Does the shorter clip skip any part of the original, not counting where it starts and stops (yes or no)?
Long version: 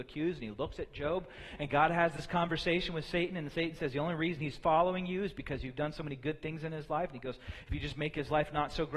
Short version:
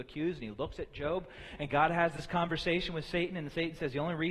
no